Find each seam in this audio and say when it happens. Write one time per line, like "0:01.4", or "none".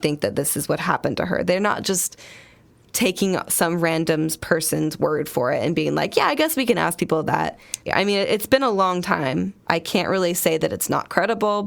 0:07.9
0:09.6